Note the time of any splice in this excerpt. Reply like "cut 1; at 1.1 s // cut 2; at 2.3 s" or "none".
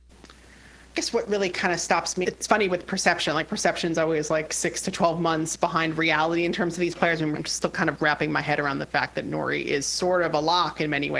cut 1; at 2.2 s // cut 2; at 7.3 s